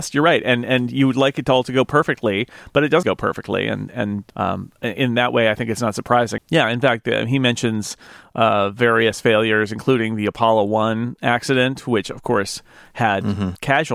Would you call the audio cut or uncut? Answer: cut